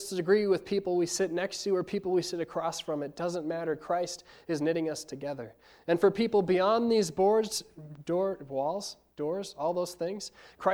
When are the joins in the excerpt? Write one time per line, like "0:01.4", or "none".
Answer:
none